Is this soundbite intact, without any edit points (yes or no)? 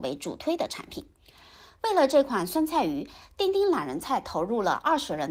yes